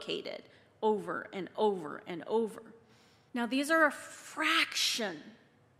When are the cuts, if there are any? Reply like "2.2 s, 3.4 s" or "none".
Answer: 3.3 s

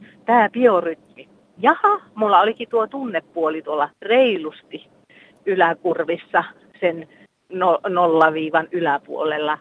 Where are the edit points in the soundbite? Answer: 1.6 s, 3.9 s

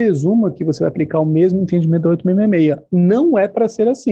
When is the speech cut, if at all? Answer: none

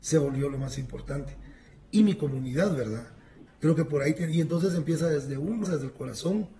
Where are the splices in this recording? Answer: 3.5 s, 5.6 s

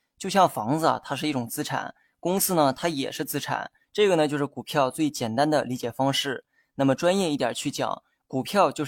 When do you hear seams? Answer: 3.8 s

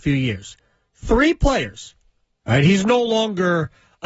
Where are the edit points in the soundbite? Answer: 2.4 s

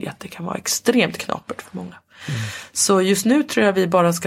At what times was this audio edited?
none

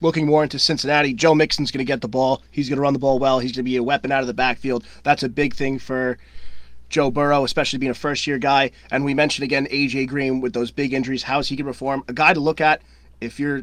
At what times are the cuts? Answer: none

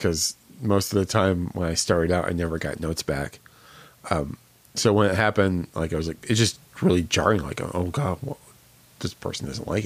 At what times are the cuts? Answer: none

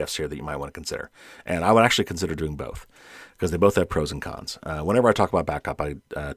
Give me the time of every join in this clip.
none

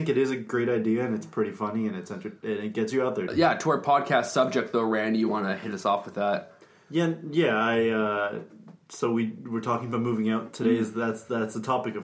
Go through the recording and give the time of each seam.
3.3 s

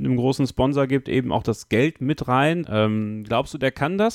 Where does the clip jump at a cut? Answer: 2.6 s

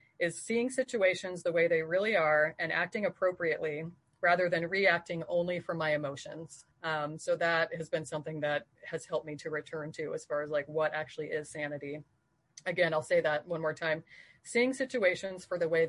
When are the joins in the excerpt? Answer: 6.7 s

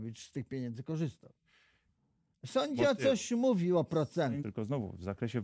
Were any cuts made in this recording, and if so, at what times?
2.3 s, 4.4 s

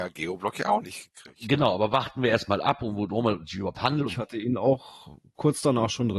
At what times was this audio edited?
4.1 s

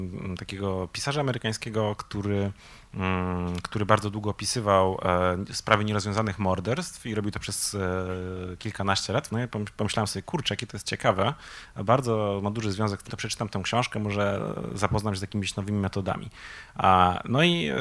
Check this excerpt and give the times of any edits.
9.3 s, 13.1 s

